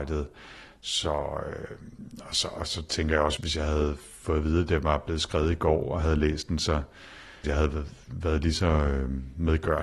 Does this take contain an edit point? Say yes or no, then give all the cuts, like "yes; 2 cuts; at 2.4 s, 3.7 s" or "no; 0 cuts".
yes; 2 cuts; at 3.4 s, 7.4 s